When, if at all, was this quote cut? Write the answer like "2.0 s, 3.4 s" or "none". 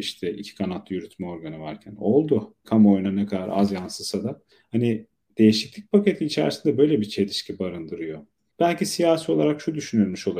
none